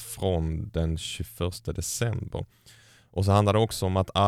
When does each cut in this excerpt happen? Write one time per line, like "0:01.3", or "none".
none